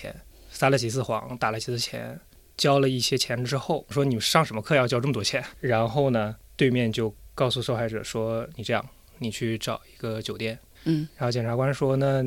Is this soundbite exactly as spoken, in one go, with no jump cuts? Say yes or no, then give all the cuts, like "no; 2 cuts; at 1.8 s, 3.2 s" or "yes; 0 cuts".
no; 2 cuts; at 3.9 s, 10.7 s